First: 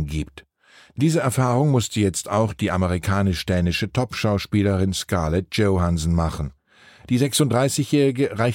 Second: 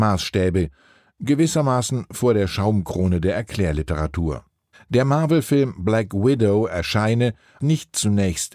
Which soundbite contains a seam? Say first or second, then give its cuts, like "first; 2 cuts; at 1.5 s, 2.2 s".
second; 2 cuts; at 4.7 s, 7.6 s